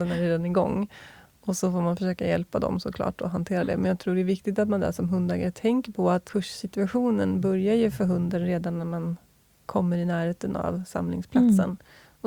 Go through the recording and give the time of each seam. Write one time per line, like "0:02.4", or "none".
none

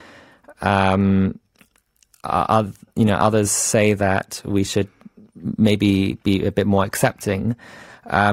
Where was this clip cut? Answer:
none

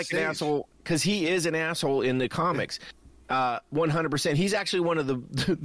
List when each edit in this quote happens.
none

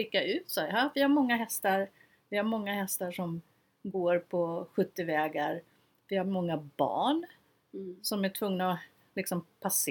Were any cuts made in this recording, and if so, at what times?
none

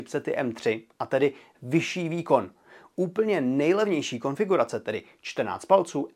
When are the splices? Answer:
none

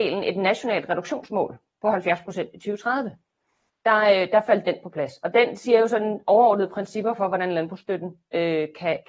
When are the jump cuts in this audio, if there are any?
0:03.7

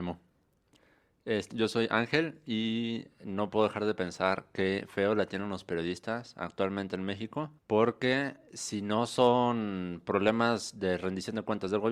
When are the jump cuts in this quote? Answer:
0:01.5
0:07.6

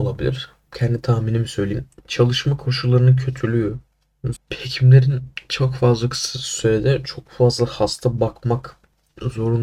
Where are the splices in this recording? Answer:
0:04.4

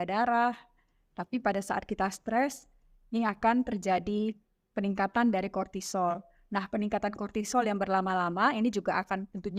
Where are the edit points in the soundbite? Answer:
none

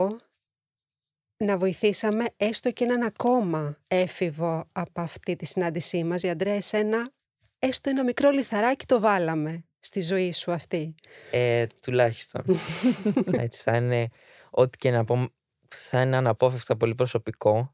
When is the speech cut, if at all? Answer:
0:06.2
0:13.4

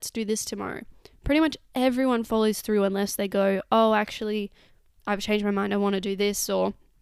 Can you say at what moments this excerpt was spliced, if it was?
none

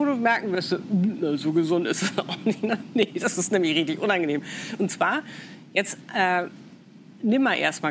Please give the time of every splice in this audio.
none

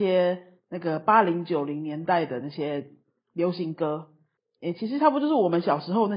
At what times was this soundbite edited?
0:04.4

